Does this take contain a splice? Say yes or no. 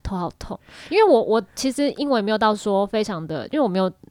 no